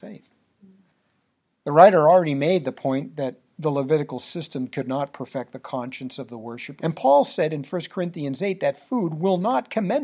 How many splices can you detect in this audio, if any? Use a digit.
1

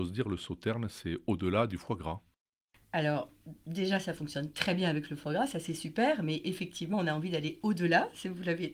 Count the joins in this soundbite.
0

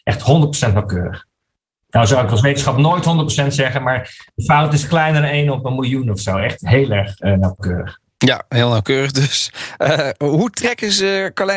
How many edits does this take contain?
0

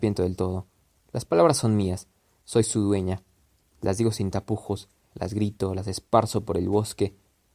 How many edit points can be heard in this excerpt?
2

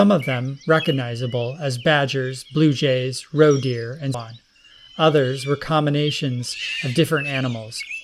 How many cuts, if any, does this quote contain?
1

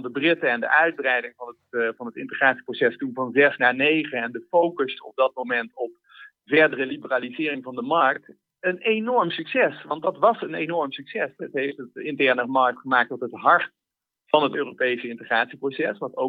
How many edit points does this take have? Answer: 1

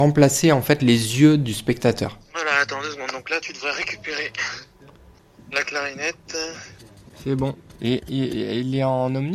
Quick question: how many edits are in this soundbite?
0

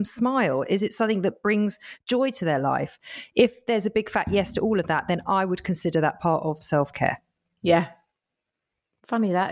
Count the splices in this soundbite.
0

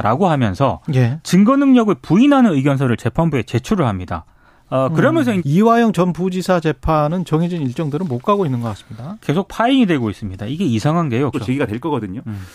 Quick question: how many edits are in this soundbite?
2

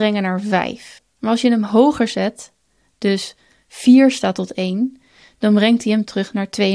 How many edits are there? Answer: 0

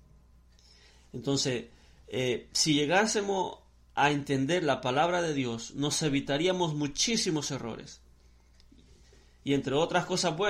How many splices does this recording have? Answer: 0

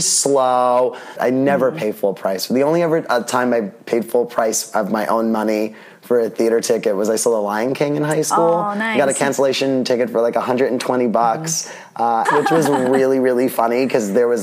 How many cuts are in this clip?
2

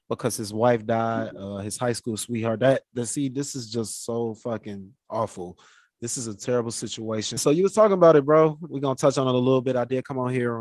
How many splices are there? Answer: 2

